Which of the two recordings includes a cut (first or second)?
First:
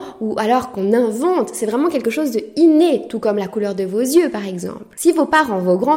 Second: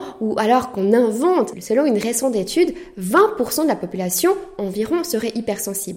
second